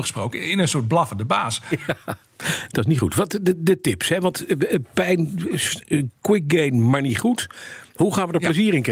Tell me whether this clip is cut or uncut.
uncut